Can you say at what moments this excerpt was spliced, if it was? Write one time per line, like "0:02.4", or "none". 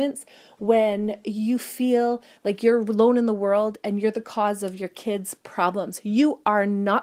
none